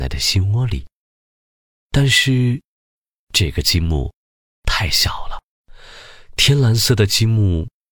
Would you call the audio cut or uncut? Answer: uncut